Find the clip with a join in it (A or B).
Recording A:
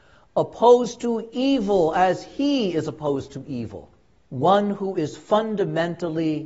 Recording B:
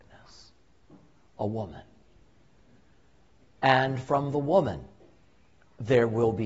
A